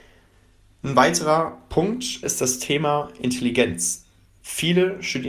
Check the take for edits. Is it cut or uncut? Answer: cut